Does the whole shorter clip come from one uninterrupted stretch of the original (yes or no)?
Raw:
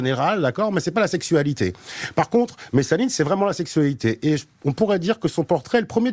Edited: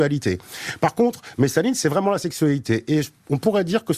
yes